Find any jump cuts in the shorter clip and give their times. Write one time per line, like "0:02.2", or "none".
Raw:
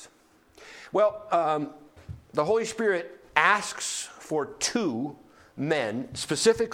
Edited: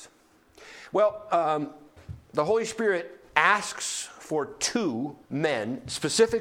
0:05.2